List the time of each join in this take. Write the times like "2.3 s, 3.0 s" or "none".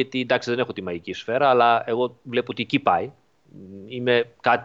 none